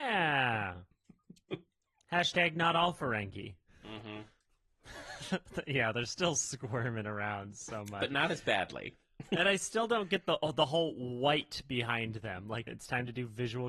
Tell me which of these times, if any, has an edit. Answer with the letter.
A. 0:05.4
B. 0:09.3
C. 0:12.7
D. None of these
C